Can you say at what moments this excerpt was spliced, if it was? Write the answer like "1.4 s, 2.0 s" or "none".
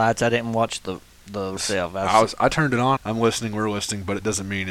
1.6 s, 3.0 s